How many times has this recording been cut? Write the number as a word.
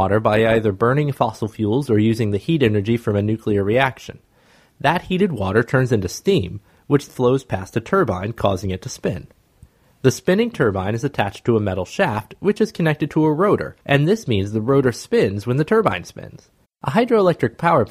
three